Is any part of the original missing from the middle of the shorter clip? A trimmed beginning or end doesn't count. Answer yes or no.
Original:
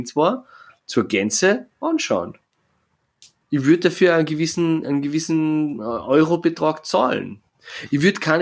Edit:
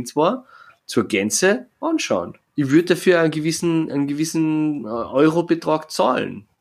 yes